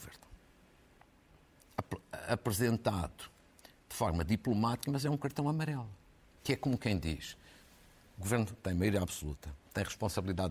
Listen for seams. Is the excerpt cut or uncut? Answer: uncut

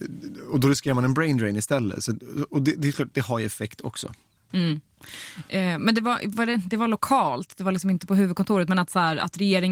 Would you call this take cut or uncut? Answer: uncut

